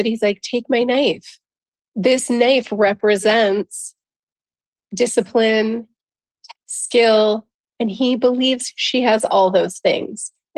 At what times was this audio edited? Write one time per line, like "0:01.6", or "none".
0:06.5